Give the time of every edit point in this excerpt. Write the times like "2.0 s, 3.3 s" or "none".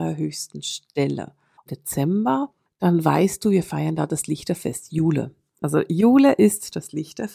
1.7 s, 5.6 s